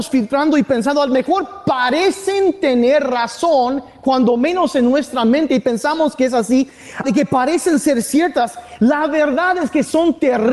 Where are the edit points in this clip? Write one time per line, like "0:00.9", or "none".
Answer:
0:07.0